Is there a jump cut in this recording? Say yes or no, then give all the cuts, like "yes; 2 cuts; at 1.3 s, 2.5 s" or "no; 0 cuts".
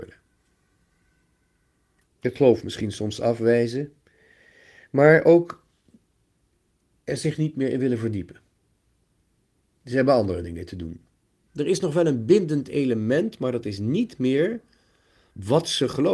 yes; 2 cuts; at 2.0 s, 11.5 s